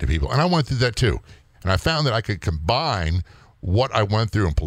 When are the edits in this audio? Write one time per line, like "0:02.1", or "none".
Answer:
0:01.5